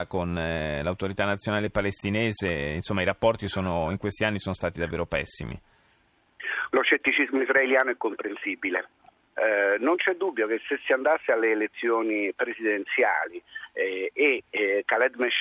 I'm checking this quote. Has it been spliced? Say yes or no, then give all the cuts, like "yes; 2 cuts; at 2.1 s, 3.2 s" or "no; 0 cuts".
yes; 2 cuts; at 6.7 s, 9.3 s